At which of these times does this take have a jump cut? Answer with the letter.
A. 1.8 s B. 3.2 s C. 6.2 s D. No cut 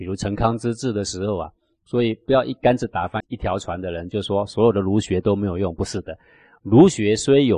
B